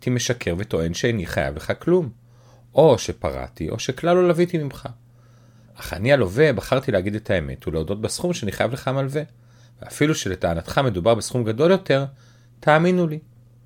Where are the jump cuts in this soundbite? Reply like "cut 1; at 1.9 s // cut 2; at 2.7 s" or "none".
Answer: none